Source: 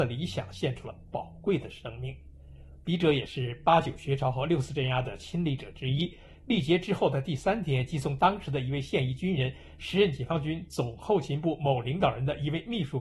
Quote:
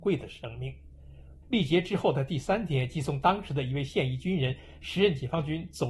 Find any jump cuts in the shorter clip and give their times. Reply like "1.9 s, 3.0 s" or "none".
1.4 s